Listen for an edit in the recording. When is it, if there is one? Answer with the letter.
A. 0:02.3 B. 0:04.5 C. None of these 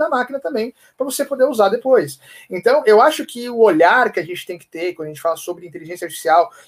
C